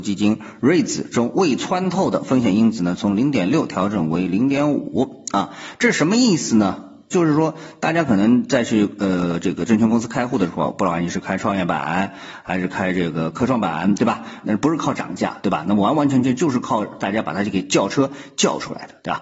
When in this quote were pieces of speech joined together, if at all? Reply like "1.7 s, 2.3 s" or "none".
7.1 s, 14.4 s